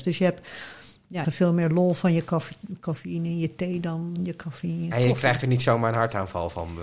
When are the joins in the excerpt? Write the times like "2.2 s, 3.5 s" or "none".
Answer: 1.2 s